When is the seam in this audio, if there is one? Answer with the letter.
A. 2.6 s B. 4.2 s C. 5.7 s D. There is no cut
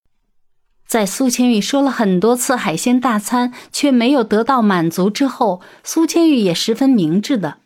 D